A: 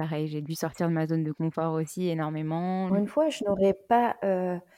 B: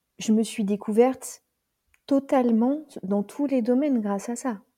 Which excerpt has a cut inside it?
A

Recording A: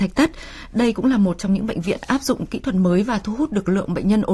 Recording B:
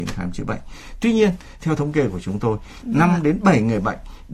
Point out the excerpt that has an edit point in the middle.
B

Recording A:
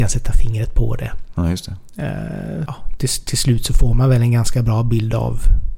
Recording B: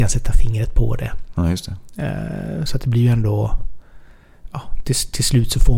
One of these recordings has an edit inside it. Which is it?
A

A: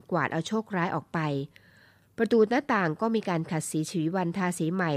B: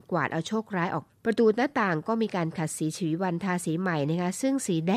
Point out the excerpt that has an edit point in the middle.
B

